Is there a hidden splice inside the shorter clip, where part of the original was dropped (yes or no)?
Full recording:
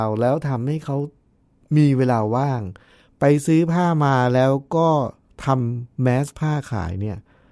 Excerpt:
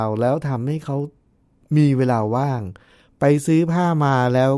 no